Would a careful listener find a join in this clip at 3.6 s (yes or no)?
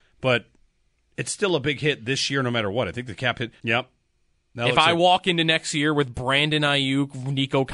yes